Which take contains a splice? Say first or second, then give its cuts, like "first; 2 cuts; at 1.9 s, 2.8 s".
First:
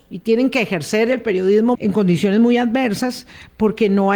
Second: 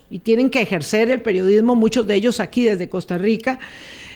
first; 1 cut; at 1.7 s